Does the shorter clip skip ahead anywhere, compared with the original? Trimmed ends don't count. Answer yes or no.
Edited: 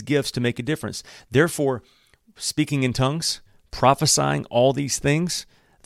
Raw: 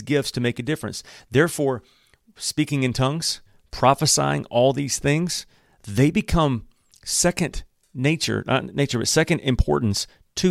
no